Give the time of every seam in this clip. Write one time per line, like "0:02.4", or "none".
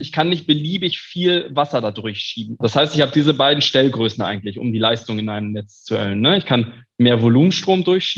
0:02.6